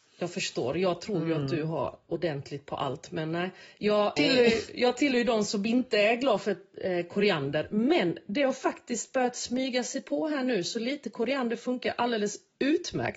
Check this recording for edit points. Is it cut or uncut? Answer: cut